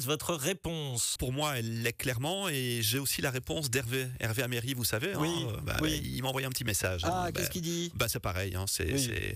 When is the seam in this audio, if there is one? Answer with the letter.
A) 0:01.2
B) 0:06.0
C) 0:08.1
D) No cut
A